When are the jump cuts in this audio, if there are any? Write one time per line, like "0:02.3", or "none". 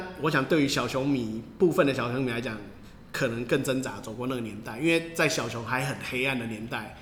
none